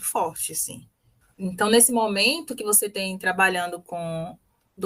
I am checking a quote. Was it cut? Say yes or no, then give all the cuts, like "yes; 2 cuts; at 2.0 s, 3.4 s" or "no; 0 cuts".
no; 0 cuts